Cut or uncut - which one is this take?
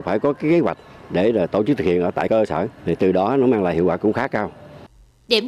cut